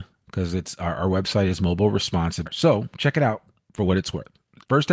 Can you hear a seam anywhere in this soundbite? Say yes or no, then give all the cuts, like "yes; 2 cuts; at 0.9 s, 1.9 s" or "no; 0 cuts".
yes; 1 cut; at 2.4 s